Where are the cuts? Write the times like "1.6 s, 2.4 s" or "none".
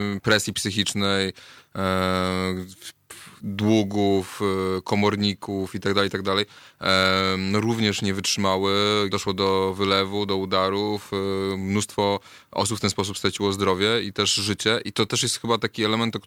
9.1 s